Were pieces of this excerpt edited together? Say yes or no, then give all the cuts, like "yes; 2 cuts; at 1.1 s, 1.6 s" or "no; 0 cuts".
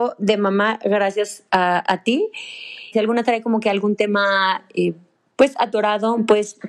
yes; 1 cut; at 2.9 s